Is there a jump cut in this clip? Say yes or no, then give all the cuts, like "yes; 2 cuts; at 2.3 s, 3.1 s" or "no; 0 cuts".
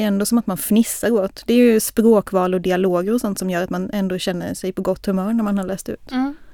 no; 0 cuts